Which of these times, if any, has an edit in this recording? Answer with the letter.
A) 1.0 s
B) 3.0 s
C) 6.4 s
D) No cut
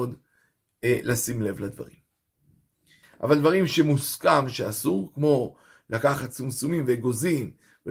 B